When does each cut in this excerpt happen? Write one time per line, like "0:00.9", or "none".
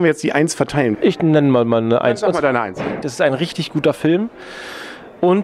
0:00.9
0:03.0